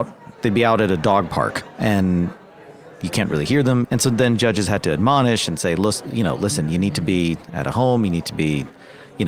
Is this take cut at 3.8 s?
yes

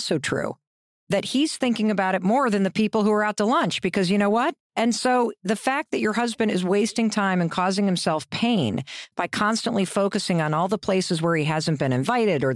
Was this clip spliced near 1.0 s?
no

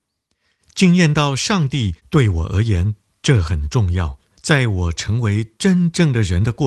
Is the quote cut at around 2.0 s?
yes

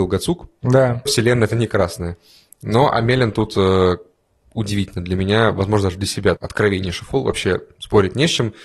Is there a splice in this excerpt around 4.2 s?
no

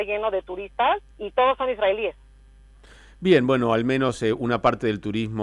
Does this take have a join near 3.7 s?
no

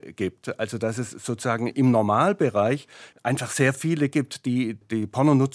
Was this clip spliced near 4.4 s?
no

